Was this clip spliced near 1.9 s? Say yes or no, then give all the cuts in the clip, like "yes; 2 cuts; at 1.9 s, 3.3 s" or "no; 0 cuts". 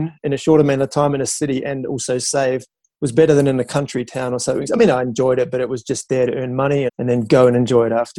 no; 2 cuts; at 4.7 s, 6.9 s